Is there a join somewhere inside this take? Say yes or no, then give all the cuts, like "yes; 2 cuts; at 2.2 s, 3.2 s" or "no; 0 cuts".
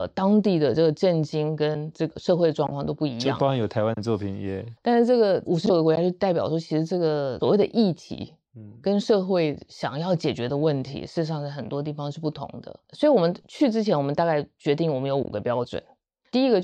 yes; 1 cut; at 4.8 s